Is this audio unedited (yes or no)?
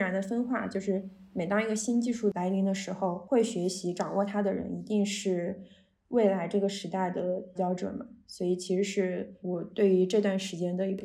no